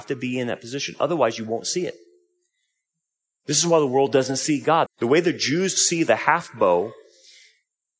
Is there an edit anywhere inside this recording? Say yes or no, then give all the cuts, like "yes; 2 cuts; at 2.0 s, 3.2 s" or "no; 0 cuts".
yes; 1 cut; at 4.9 s